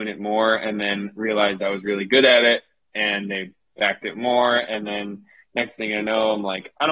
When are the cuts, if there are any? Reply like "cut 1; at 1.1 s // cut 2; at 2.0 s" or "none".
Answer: none